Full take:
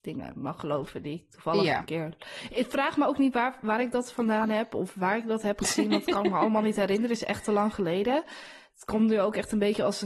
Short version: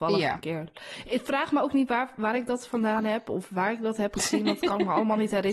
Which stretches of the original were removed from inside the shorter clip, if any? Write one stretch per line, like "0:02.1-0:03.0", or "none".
none